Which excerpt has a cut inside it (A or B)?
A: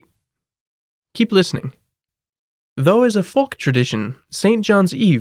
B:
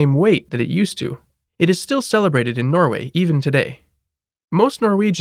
A